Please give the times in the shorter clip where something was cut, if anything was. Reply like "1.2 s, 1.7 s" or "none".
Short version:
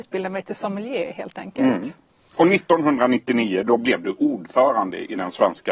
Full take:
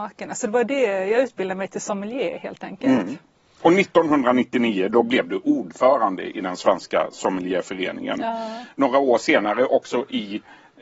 none